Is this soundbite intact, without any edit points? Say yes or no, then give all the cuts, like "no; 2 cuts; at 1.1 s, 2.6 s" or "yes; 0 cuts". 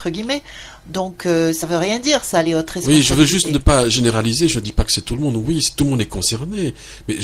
yes; 0 cuts